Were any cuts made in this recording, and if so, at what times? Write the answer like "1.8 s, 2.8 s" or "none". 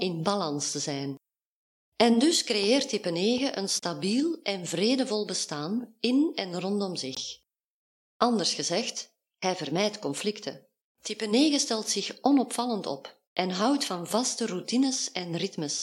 10.8 s, 13.3 s

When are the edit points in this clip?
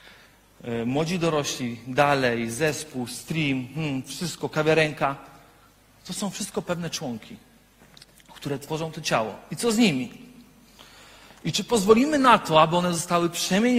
none

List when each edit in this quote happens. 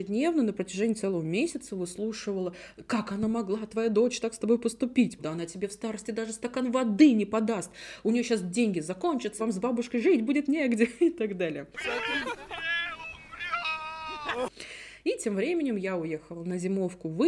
5.2 s, 9.4 s

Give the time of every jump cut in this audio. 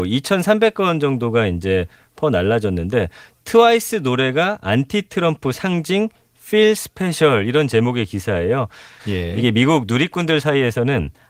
9.0 s

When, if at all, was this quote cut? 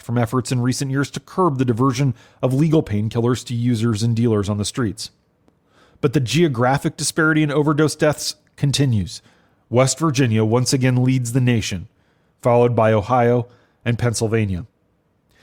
none

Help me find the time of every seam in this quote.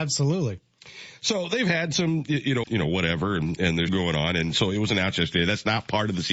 2.6 s, 3.9 s

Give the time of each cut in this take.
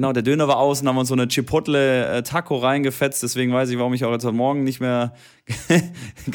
none

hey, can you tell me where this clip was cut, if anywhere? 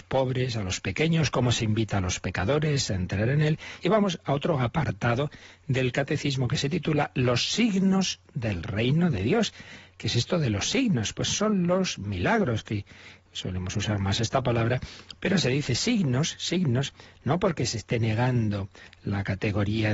3.8 s

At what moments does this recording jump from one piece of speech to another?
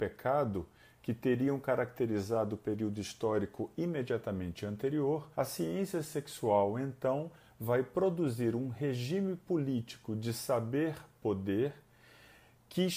5.3 s

